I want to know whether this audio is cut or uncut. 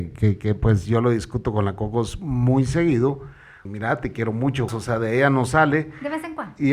cut